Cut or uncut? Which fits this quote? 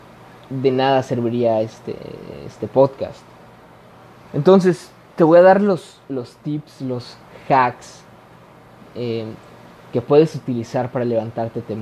uncut